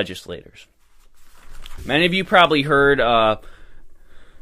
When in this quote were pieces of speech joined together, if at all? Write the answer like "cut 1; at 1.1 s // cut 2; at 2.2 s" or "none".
cut 1; at 1.8 s